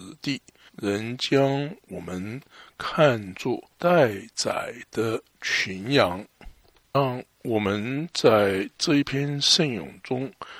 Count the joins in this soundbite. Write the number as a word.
one